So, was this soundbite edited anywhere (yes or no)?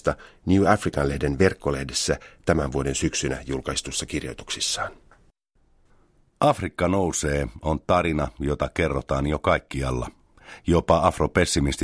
no